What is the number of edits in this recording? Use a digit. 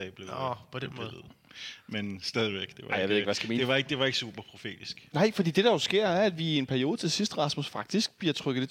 0